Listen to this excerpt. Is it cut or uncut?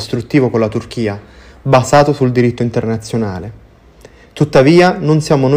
uncut